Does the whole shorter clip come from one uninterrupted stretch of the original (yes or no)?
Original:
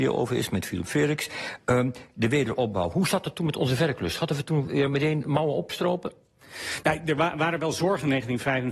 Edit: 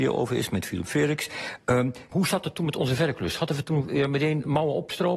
no